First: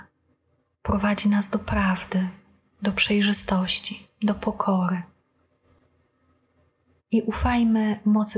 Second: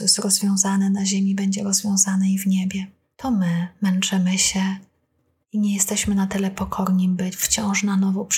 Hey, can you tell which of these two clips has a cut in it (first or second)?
second